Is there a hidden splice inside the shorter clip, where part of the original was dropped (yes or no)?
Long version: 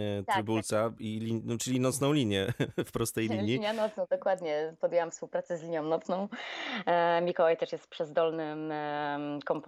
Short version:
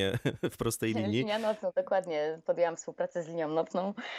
no